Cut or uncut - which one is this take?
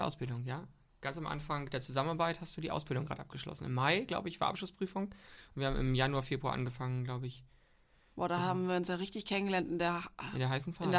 uncut